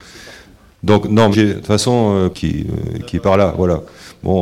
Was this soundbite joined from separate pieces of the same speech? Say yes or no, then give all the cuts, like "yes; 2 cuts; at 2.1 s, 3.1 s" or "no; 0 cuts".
yes; 2 cuts; at 1.3 s, 2.3 s